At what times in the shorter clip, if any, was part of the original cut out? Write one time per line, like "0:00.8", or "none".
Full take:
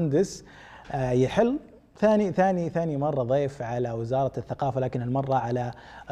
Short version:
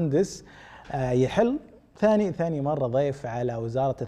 0:02.3

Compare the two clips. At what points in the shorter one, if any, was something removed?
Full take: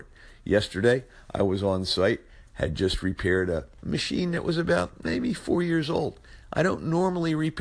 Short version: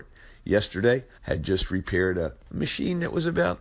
0:01.2

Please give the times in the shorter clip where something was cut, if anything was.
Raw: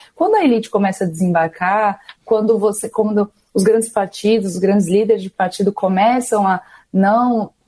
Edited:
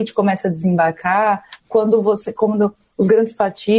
none

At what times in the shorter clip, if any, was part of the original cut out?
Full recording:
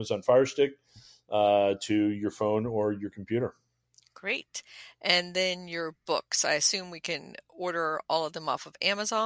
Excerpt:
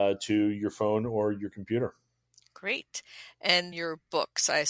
0:03.7

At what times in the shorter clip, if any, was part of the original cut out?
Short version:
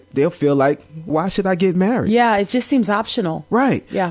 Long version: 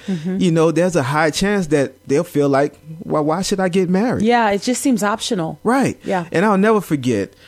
0:01.1

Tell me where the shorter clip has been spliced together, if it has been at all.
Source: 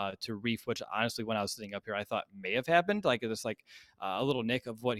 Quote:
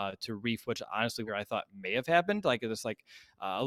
0:01.3

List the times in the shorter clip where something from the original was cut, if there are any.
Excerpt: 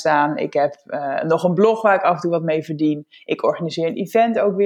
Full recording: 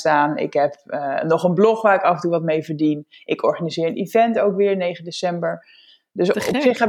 none

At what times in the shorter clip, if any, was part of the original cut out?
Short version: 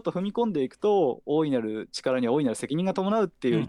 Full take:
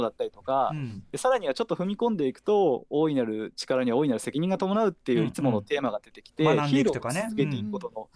none

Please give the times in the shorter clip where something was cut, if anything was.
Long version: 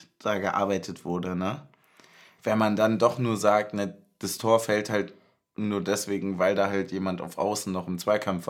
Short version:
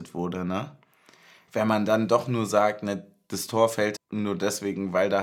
0:04.0

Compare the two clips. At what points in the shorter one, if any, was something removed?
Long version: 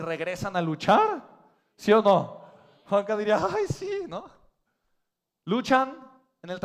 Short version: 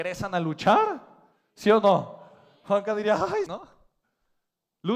0:03.5

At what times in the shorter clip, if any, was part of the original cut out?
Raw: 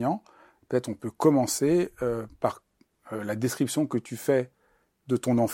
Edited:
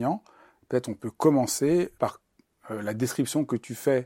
0:01.9

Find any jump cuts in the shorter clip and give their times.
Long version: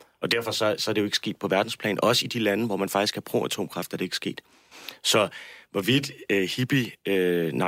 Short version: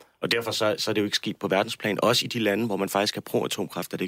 none

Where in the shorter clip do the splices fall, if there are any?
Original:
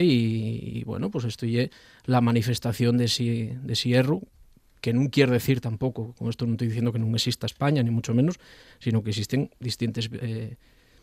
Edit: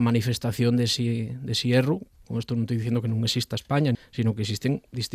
0:02.2
0:03.9

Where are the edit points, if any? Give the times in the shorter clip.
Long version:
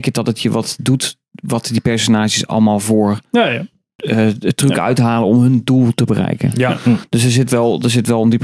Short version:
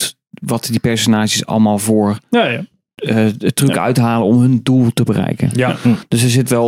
none

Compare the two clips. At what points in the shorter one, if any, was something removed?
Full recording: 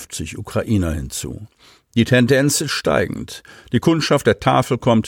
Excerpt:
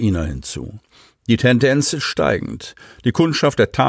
none

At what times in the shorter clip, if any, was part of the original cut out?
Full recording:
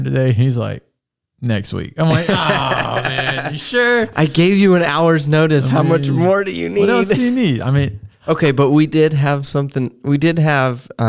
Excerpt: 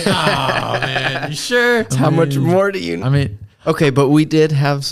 0:01.9
0:03.0

